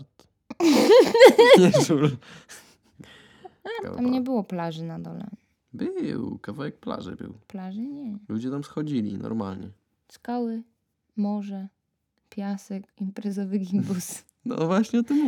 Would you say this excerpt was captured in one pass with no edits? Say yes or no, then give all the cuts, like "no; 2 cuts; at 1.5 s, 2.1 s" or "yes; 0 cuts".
no; 2 cuts; at 3.8 s, 12.9 s